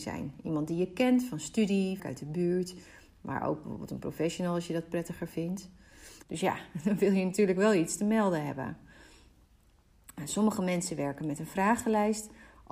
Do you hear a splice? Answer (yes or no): yes